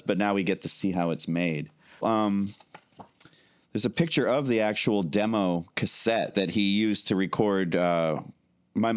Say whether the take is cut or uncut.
cut